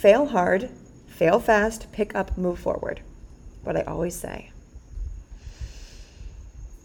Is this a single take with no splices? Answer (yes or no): yes